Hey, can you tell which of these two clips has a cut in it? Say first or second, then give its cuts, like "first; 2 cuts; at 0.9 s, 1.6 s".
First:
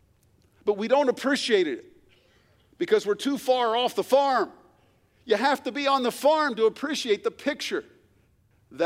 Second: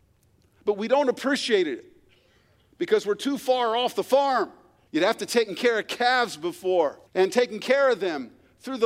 second; 2 cuts; at 4.9 s, 7.1 s